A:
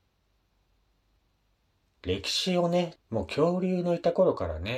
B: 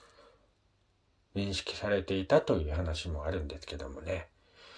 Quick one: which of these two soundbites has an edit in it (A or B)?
A